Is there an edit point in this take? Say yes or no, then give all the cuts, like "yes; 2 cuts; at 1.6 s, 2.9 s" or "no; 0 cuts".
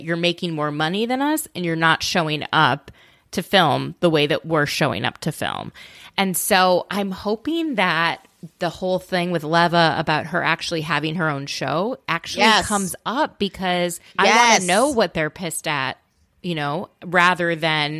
yes; 1 cut; at 14.1 s